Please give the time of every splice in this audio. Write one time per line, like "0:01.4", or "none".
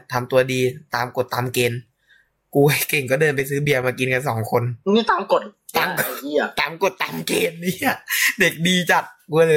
0:04.8